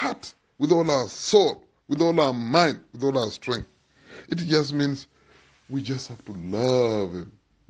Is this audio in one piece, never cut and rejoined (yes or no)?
yes